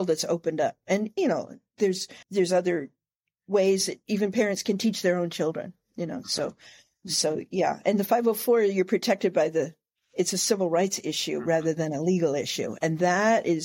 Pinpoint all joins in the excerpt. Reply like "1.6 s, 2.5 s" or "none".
2.2 s